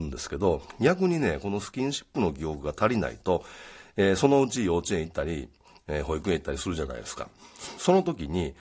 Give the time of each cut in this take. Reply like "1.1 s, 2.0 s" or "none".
none